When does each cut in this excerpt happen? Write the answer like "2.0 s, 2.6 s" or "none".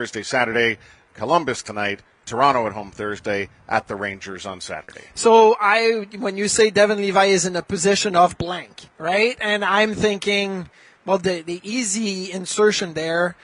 none